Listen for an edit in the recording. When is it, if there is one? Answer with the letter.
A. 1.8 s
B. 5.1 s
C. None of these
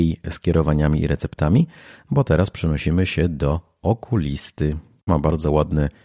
B